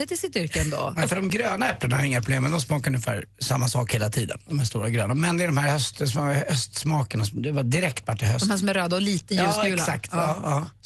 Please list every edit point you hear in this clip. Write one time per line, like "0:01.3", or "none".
none

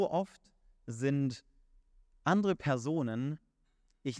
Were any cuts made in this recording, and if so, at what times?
none

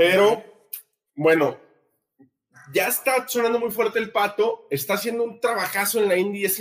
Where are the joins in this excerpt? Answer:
none

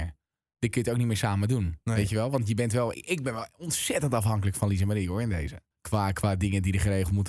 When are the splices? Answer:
0:02.9
0:05.7

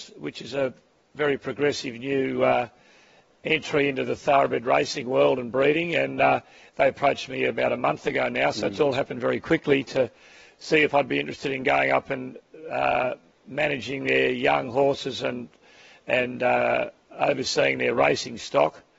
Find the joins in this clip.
none

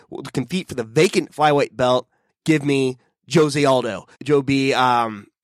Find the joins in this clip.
0:02.3
0:04.1

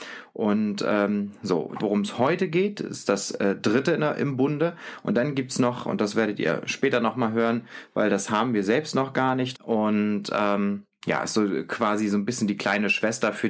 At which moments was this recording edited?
0:01.8
0:09.5

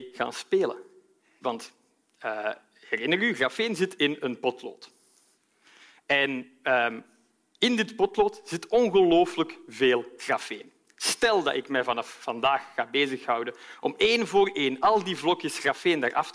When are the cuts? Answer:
0:01.4

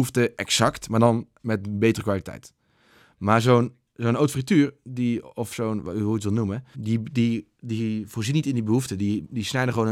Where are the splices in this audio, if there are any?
0:06.7

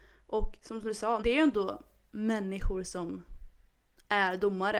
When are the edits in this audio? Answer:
0:01.2

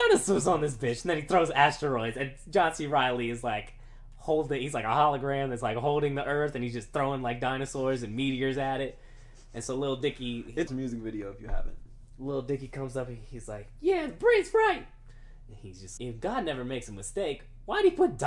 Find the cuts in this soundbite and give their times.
0:10.7
0:16.0

